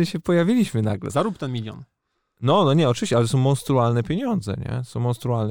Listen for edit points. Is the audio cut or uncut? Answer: cut